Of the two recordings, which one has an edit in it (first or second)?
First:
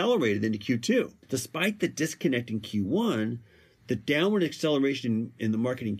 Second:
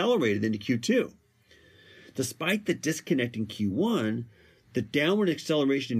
first